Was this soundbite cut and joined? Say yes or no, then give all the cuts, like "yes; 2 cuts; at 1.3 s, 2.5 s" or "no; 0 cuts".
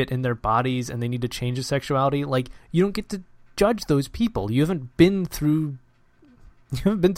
no; 0 cuts